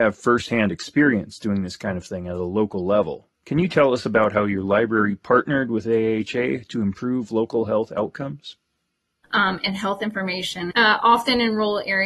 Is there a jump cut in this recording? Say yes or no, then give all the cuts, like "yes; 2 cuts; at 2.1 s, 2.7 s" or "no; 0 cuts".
yes; 3 cuts; at 3.3 s, 9.2 s, 10.7 s